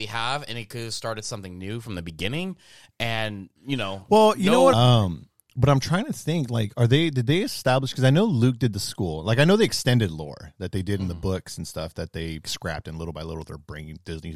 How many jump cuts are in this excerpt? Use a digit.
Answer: 3